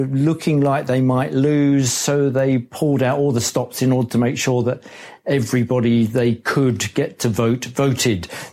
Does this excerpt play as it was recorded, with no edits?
yes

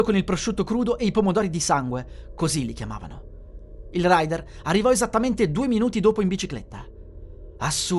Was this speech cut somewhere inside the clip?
no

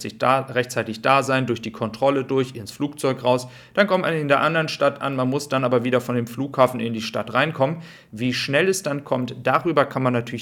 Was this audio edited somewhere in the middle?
yes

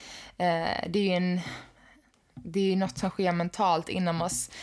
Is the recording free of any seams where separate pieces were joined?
yes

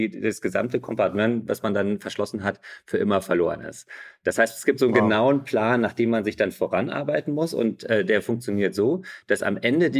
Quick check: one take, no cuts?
yes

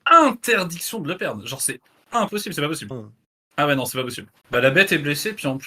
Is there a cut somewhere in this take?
yes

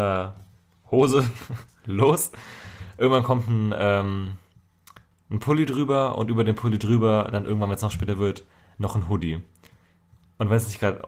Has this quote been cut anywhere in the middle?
no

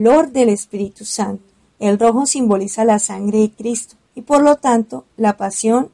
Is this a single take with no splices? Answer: no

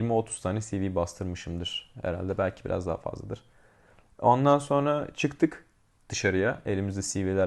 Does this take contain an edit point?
no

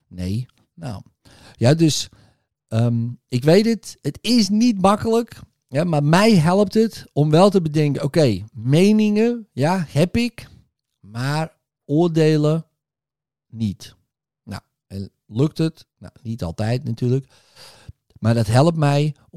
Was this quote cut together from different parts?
no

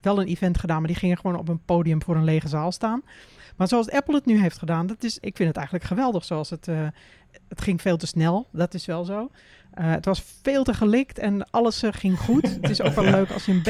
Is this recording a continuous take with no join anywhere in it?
no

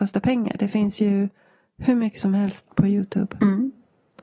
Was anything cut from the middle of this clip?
yes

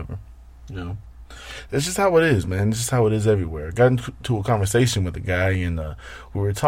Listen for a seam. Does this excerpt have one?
no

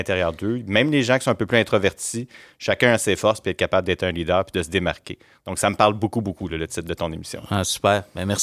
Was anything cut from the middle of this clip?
no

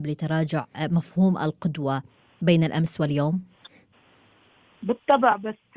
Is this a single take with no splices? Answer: yes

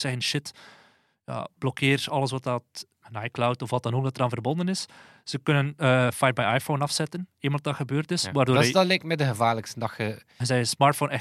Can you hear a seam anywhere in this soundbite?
no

